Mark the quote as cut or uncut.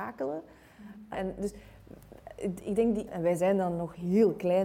cut